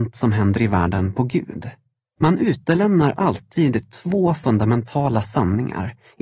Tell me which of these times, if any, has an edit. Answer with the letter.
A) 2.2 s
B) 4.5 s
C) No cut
A